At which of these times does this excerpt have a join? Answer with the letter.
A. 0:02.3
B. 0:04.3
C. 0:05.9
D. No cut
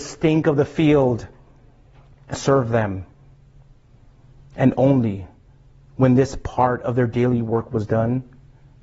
A